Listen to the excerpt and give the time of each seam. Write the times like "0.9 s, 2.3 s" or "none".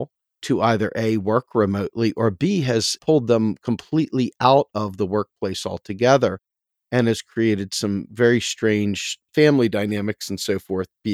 none